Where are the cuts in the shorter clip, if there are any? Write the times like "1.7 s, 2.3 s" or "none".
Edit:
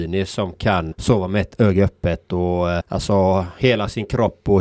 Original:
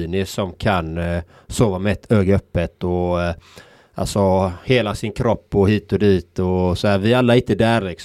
0.9 s, 2.8 s